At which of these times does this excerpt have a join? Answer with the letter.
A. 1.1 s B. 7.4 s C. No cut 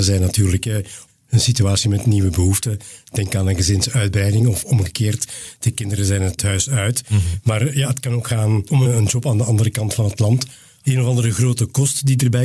A